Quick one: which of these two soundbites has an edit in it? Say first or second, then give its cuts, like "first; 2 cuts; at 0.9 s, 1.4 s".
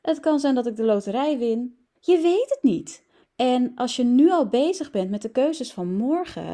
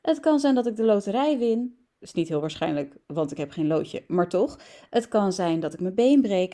first; 2 cuts; at 1.9 s, 3.2 s